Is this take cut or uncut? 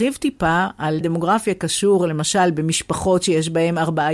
cut